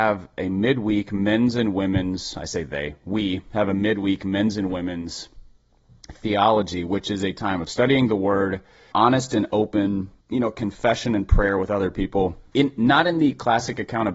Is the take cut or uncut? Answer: cut